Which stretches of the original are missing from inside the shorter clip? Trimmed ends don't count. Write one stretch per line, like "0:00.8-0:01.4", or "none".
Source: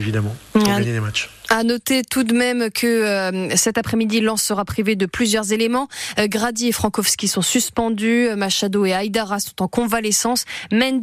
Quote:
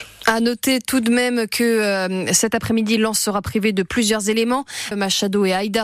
0:06.1-0:08.3